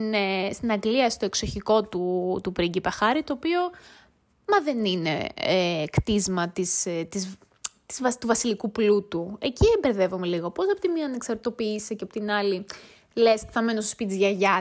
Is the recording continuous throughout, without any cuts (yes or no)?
yes